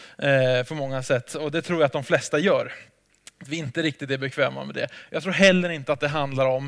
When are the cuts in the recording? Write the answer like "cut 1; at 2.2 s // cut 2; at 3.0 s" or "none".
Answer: none